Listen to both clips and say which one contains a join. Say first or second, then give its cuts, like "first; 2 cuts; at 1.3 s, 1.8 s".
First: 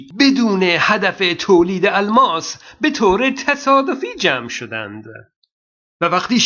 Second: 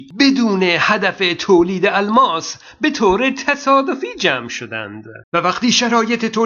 second; 1 cut; at 5.2 s